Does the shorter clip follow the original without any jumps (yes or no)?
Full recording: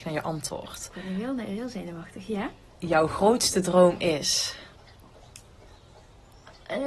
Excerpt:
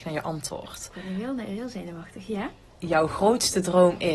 yes